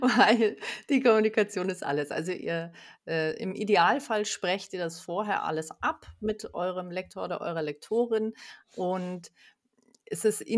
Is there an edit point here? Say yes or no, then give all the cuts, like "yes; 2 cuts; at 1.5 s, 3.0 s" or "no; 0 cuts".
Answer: no; 0 cuts